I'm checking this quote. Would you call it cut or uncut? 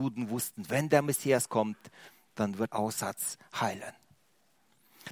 cut